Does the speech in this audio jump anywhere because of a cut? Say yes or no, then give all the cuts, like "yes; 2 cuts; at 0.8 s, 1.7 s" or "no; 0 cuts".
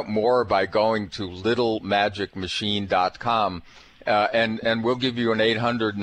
no; 0 cuts